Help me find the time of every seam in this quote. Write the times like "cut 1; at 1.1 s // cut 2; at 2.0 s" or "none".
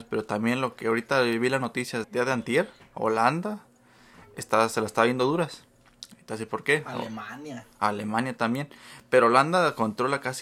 cut 1; at 2.0 s